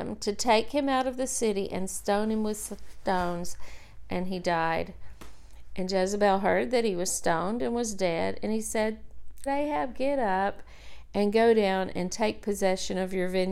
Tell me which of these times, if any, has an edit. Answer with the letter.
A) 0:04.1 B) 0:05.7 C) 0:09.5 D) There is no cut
C